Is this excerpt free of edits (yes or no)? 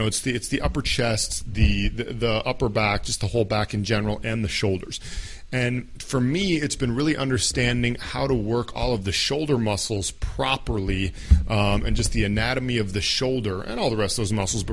yes